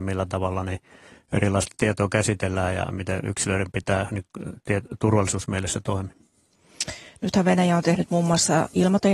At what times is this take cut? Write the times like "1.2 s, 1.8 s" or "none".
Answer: none